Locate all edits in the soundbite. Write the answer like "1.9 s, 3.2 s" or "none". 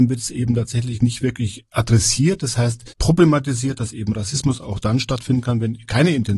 2.9 s